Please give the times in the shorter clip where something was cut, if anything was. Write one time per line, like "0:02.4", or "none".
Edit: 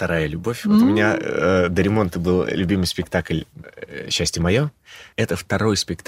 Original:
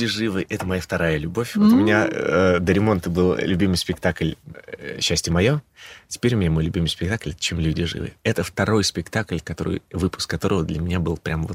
0:05.1